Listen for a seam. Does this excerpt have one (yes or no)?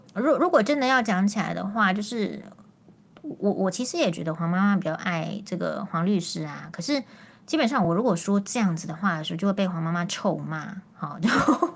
no